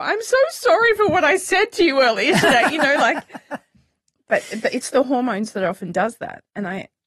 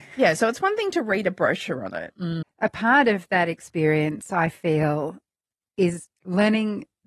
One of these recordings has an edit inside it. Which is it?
second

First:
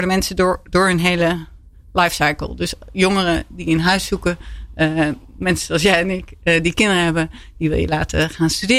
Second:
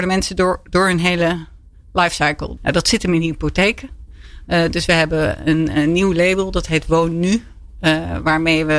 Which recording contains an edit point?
second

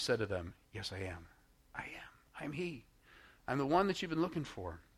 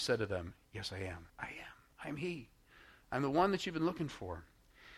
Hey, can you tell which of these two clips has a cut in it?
second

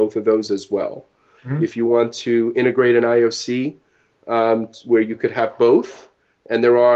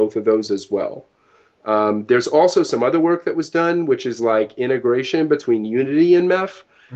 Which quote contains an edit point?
first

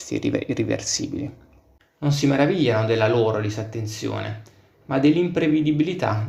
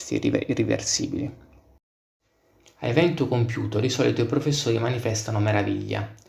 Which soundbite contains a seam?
first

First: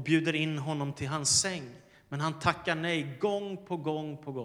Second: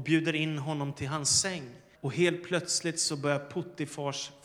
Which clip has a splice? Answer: second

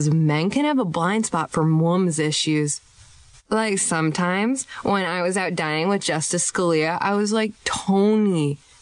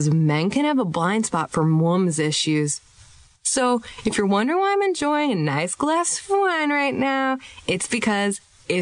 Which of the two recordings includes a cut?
second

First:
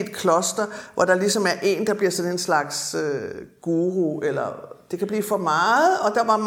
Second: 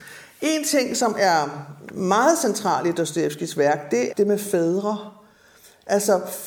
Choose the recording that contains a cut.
second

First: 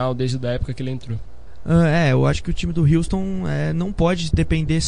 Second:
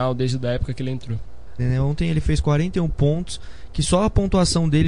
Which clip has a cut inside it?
second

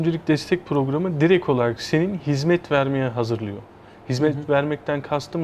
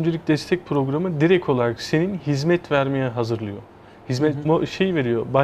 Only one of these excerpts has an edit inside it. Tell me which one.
second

